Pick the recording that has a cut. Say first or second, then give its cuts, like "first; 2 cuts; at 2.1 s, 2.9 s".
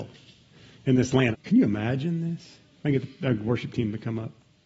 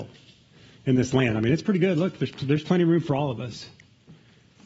first; 1 cut; at 1.3 s